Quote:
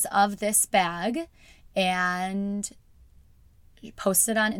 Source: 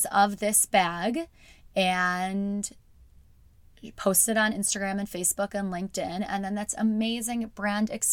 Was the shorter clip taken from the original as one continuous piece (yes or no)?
yes